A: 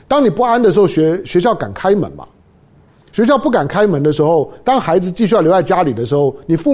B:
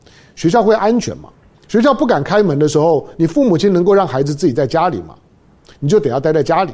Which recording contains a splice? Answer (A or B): B